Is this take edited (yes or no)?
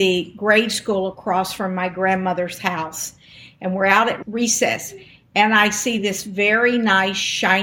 no